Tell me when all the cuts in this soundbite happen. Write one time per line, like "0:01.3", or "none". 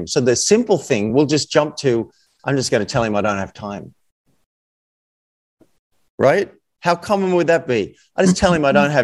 none